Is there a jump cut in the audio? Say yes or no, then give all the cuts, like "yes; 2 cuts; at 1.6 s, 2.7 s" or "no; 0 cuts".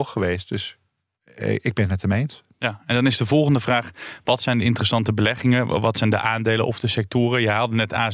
no; 0 cuts